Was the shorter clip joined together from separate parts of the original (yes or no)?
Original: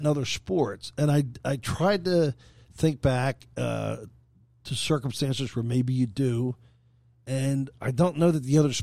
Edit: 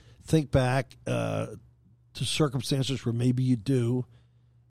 no